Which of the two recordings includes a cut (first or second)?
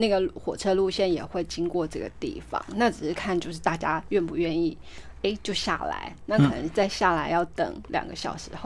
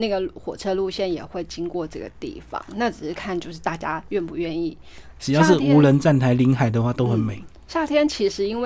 second